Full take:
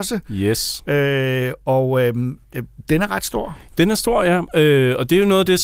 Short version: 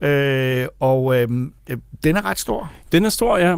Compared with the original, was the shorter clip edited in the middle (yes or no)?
no